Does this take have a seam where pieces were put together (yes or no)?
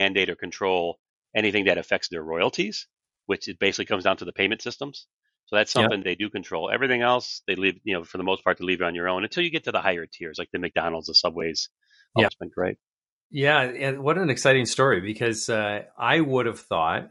yes